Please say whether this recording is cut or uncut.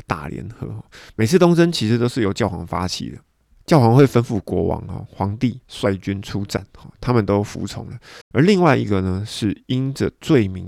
cut